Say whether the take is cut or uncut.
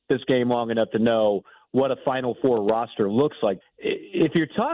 cut